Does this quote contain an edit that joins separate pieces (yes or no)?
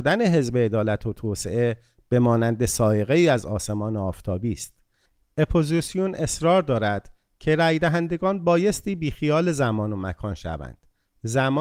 no